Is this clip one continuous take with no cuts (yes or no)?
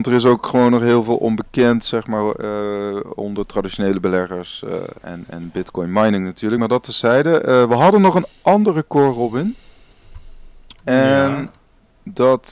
yes